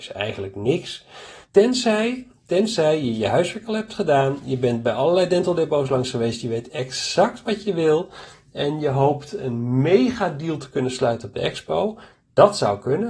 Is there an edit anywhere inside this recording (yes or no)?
yes